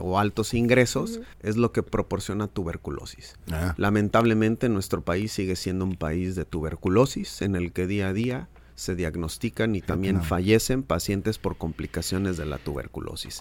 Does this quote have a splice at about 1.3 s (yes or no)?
yes